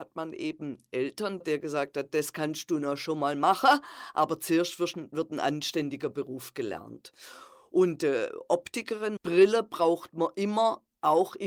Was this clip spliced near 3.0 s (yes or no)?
no